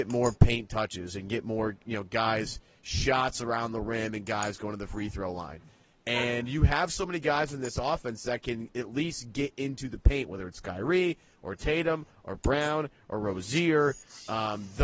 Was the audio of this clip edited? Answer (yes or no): no